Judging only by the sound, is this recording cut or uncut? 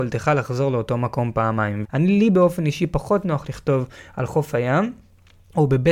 cut